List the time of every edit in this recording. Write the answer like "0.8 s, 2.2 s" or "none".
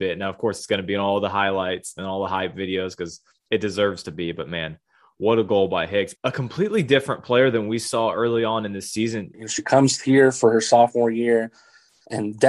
6.2 s, 9.3 s